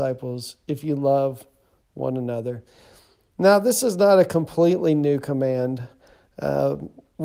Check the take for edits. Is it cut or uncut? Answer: uncut